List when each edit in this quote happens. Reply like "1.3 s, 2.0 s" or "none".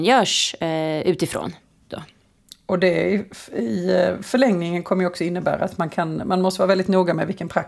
1.9 s